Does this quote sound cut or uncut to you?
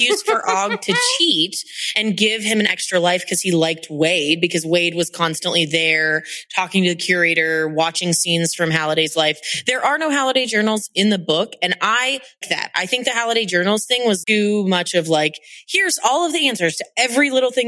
cut